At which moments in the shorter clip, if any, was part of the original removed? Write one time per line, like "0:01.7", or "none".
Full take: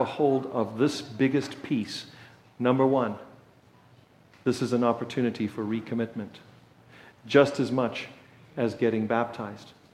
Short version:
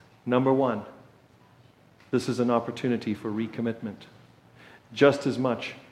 none